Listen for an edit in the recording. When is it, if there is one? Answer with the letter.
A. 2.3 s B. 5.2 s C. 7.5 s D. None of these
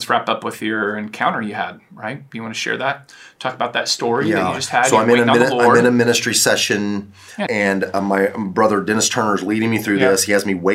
C